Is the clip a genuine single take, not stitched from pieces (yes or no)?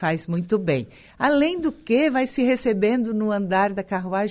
yes